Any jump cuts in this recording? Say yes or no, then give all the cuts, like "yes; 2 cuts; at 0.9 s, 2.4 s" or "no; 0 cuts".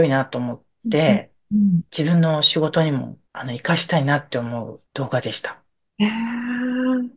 yes; 3 cuts; at 1.9 s, 3.3 s, 4.9 s